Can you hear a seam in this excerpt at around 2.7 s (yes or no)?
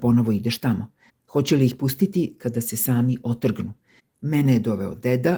no